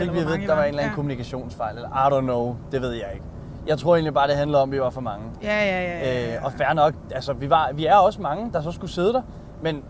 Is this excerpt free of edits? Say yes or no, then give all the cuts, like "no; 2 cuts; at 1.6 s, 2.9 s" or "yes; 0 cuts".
yes; 0 cuts